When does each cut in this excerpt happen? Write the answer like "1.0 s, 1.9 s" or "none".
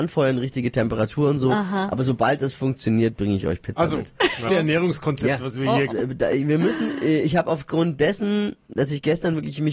4.5 s, 5.9 s

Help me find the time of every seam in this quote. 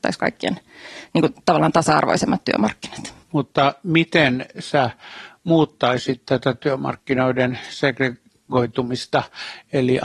3.2 s

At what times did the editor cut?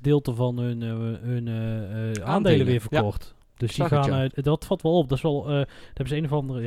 4.3 s

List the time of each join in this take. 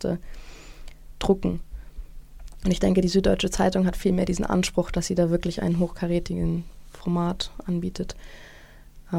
none

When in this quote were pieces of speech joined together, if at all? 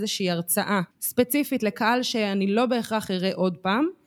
0.9 s

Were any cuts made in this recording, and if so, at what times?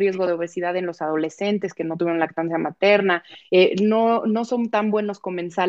none

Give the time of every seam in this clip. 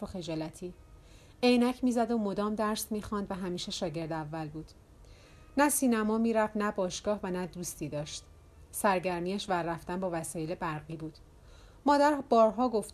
none

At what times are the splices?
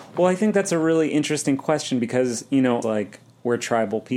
2.8 s

